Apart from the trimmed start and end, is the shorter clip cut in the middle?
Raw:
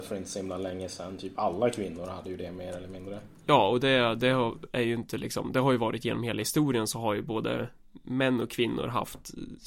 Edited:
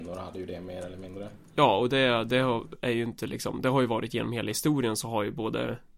no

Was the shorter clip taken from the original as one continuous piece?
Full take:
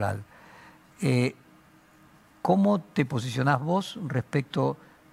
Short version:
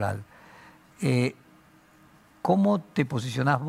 yes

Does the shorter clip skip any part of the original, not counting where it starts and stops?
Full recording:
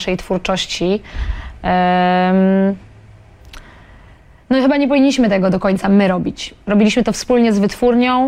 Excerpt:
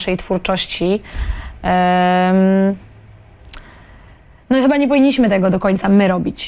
no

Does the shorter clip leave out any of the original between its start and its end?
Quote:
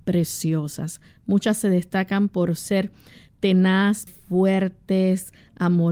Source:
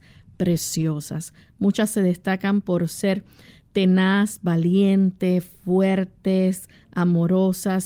yes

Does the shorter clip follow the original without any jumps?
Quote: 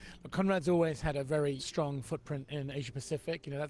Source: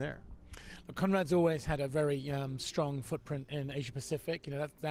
no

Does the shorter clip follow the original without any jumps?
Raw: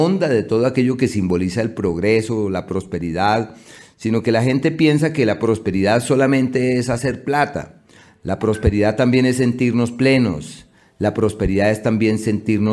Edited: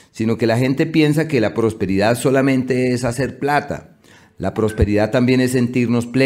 yes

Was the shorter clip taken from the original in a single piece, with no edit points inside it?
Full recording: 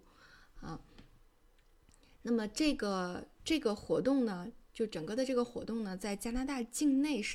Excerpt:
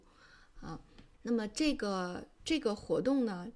no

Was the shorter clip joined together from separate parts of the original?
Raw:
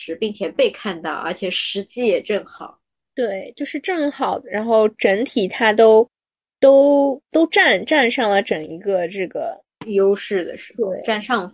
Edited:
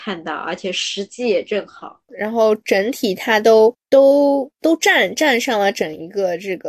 yes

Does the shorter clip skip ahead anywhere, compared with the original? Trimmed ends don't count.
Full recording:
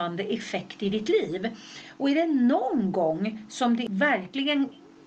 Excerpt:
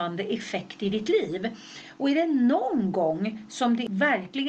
no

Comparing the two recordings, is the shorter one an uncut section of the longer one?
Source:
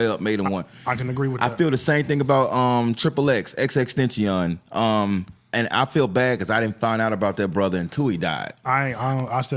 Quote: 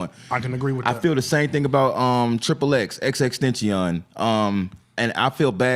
yes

